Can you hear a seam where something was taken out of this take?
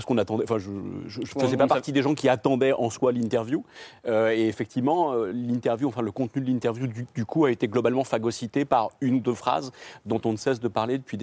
no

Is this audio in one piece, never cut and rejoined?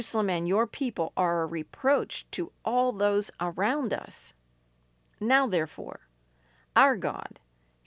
yes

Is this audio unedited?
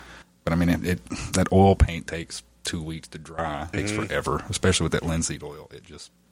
no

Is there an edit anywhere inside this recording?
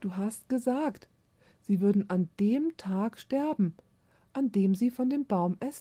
no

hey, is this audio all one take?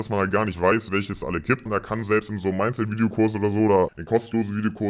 no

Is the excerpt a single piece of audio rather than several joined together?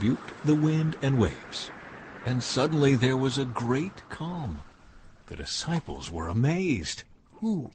yes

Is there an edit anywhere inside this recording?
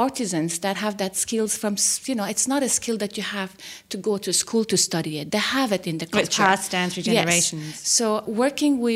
no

